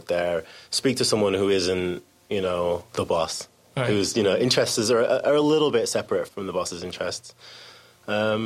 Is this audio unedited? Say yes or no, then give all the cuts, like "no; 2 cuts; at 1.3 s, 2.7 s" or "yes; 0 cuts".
no; 2 cuts; at 2.9 s, 6.3 s